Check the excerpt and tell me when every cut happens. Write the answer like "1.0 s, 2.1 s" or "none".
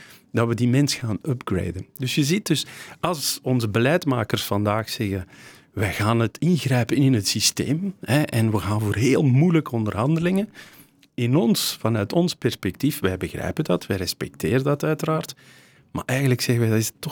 none

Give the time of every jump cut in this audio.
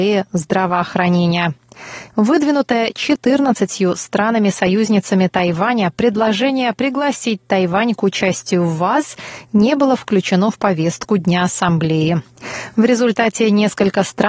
2.1 s

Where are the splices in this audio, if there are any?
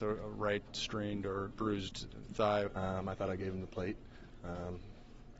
1.5 s, 2.7 s

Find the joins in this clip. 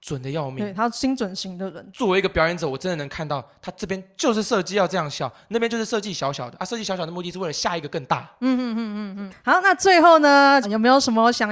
9.3 s, 10.6 s

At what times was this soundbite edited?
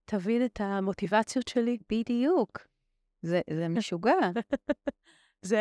3.5 s

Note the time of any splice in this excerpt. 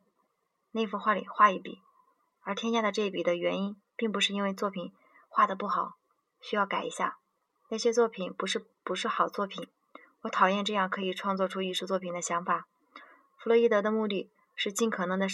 none

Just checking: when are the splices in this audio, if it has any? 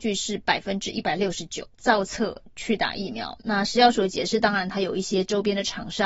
1.7 s

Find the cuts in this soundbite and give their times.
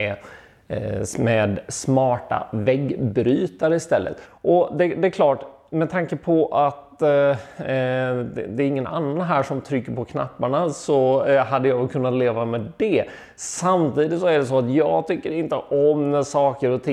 4.2 s

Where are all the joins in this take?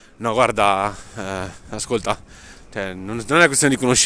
none

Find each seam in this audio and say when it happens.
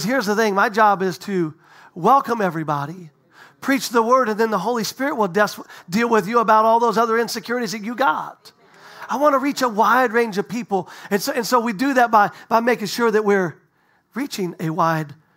none

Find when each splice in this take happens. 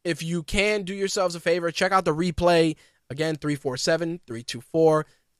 3.0 s

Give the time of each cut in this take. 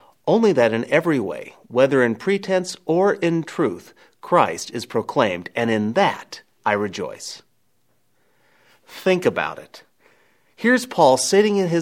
none

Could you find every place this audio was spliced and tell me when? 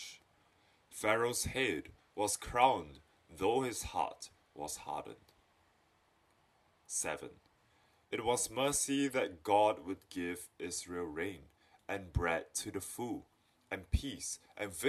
8.0 s

